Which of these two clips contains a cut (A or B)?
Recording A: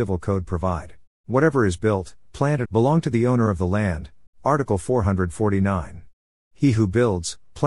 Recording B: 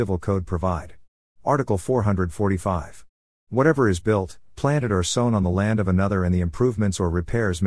A